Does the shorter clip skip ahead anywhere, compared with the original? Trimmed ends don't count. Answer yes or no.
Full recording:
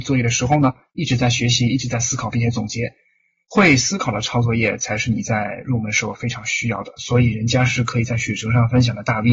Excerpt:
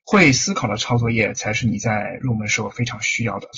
no